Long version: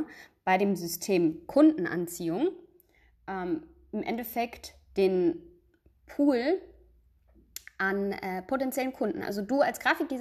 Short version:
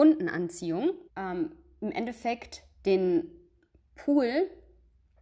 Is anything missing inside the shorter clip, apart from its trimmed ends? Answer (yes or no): yes